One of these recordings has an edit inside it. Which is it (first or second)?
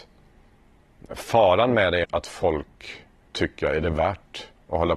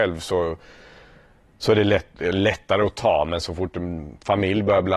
first